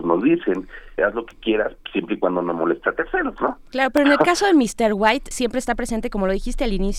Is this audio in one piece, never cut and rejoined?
no; 2 cuts; at 1.0 s, 5.3 s

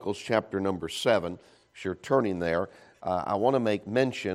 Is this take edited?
no; 0 cuts

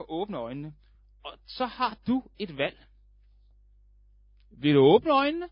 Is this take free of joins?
yes; 0 cuts

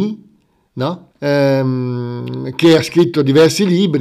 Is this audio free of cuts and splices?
no; 1 cut; at 1.1 s

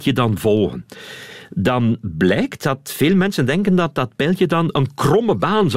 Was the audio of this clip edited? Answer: no; 0 cuts

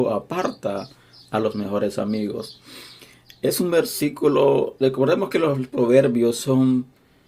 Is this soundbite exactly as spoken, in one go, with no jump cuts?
yes; 0 cuts

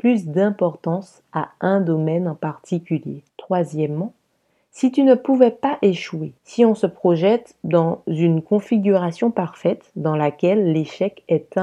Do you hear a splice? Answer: yes; 2 cuts; at 3.3 s, 6.4 s

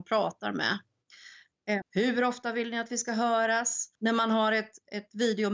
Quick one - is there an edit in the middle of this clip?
yes; 2 cuts; at 1.8 s, 4.0 s

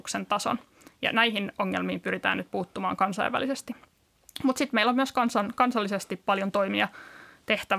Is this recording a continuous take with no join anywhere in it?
yes; 0 cuts

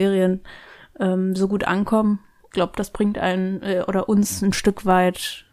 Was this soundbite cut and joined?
no; 0 cuts

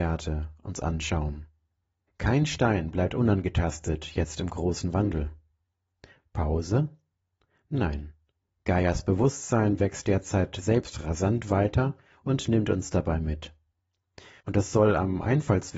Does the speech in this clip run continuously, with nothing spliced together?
yes; 0 cuts

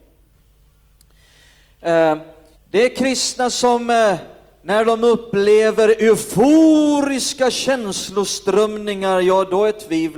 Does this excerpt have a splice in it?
yes; 1 cut; at 2.6 s

